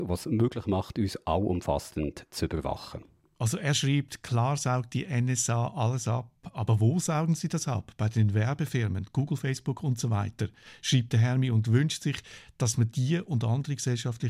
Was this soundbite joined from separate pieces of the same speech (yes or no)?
no